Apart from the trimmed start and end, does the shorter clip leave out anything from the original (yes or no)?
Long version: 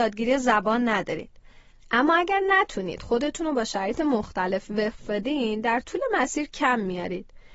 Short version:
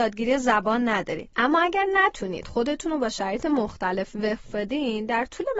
yes